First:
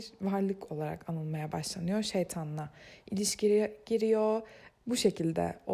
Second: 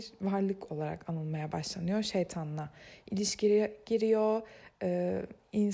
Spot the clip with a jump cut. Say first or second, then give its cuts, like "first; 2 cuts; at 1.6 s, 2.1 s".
first; 1 cut; at 4.8 s